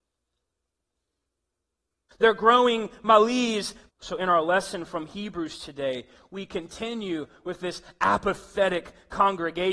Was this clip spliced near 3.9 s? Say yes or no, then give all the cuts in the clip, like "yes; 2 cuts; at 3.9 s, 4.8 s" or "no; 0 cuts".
yes; 2 cuts; at 2.1 s, 3.9 s